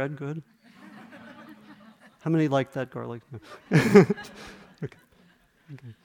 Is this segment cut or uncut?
uncut